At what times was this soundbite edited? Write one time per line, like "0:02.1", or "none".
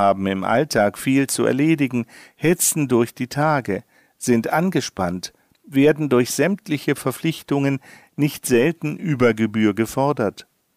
none